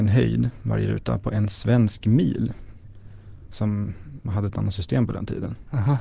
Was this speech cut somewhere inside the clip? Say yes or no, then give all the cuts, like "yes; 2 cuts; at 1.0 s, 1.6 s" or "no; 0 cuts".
yes; 1 cut; at 4.2 s